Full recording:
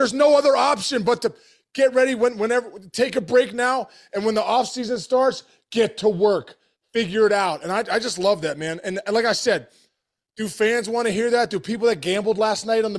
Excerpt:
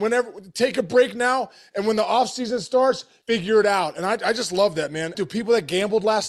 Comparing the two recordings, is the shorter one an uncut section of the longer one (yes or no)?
no